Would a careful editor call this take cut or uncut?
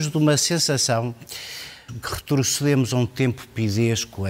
cut